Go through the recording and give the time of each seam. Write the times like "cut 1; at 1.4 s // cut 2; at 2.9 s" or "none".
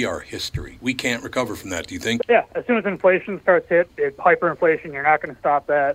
cut 1; at 2.2 s // cut 2; at 3.9 s